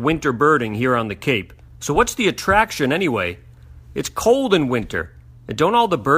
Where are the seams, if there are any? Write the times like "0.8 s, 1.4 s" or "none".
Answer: 1.7 s